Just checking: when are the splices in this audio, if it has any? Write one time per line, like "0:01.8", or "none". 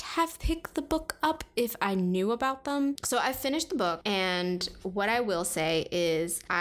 0:03.0